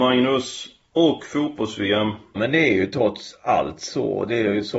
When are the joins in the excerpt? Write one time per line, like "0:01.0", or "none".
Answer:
0:02.4